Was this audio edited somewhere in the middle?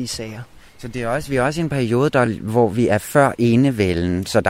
no; 0 cuts

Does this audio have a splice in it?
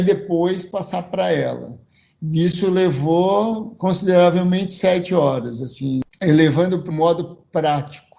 yes; 1 cut; at 6.9 s

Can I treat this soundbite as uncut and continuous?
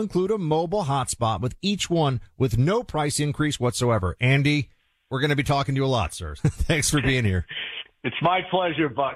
no; 2 cuts; at 4.2 s, 6.4 s

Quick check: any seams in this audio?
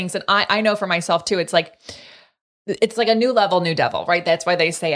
no; 0 cuts

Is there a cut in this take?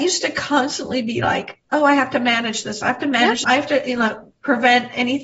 yes; 1 cut; at 3.4 s

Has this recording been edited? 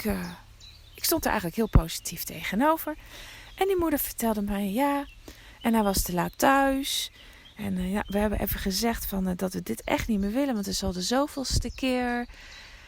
no; 0 cuts

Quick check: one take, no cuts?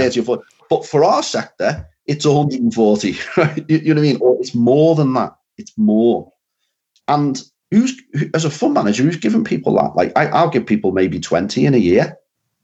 yes; 0 cuts

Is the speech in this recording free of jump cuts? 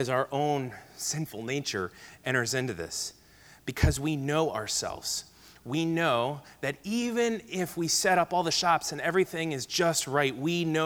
yes; 0 cuts

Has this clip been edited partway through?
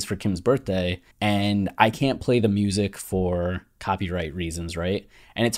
yes; 1 cut; at 1.1 s

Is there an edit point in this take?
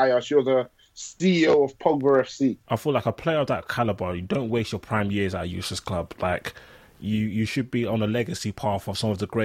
yes; 1 cut; at 2.6 s

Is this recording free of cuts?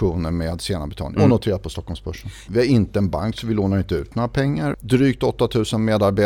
no; 3 cuts; at 1.2 s, 2.5 s, 4.7 s

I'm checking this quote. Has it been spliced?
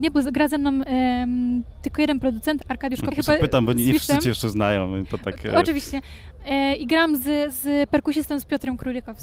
yes; 1 cut; at 3.1 s

